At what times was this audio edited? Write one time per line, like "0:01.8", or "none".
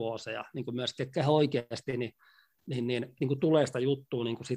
0:03.2